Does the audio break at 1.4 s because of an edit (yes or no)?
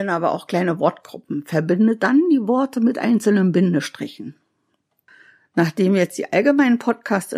no